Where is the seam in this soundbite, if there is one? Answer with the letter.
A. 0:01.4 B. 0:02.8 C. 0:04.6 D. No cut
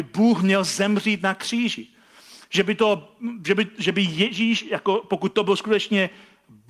D